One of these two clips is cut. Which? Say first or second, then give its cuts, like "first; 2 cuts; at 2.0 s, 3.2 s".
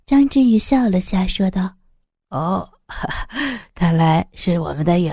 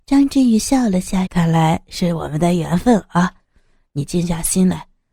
second; 1 cut; at 1.3 s